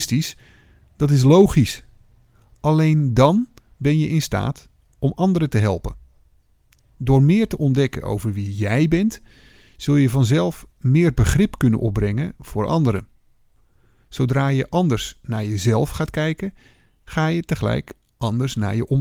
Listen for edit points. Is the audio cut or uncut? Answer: uncut